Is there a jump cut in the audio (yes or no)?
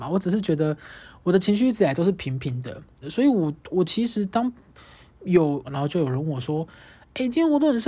yes